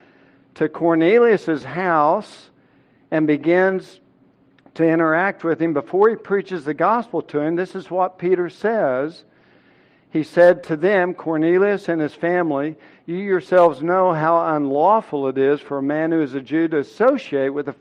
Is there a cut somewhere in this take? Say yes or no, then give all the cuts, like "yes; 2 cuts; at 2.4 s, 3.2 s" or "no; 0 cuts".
no; 0 cuts